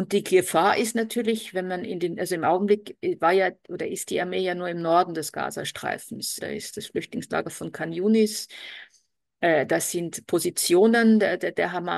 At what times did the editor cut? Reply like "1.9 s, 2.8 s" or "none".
6.4 s